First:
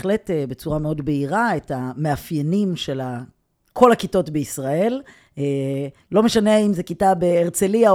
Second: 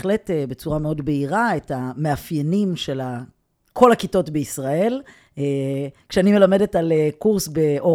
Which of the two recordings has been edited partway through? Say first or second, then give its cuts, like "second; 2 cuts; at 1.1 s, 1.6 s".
first; 1 cut; at 6.1 s